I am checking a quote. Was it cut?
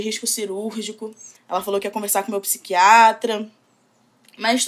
yes; 1 cut; at 1.4 s

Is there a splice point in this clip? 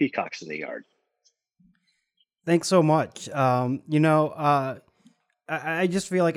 no; 0 cuts

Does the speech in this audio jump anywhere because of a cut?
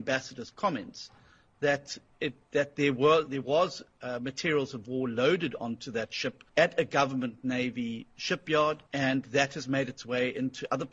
yes; 2 cuts; at 6.5 s, 8.9 s

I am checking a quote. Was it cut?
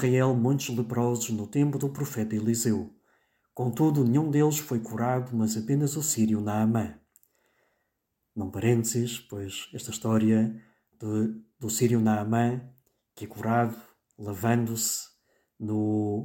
no; 0 cuts

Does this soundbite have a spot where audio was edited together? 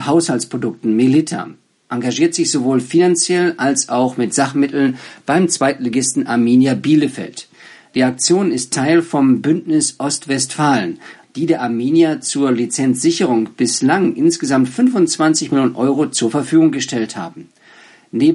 yes; 1 cut; at 11.2 s

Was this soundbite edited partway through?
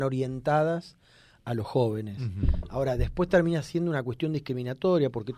no; 0 cuts

